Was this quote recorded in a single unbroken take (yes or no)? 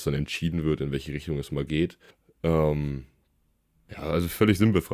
yes